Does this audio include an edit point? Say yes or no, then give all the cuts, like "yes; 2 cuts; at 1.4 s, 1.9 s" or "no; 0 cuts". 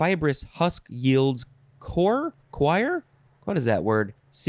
no; 0 cuts